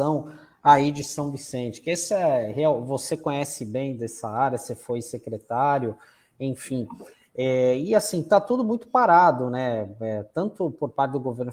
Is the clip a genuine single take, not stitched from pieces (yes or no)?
yes